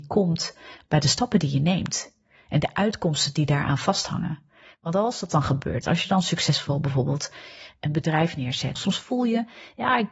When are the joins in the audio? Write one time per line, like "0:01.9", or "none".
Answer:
0:05.8
0:08.7